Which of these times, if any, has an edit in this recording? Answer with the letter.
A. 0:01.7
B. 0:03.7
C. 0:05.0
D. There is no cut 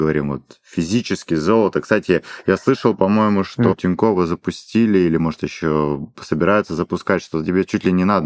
B